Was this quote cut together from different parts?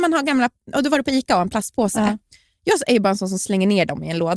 no; 0 cuts

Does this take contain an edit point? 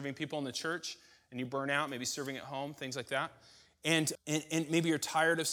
yes; 1 cut; at 4.2 s

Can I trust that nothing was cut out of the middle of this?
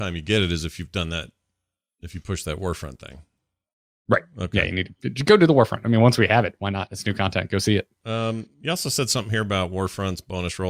yes; 0 cuts

